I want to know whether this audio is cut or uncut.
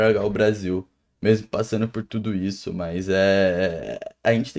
uncut